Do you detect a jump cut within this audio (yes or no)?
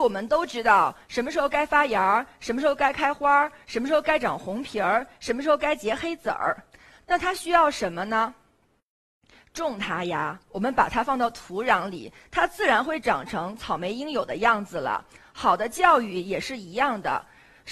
no